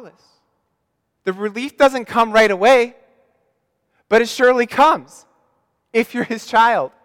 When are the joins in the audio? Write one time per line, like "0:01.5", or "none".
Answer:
0:01.2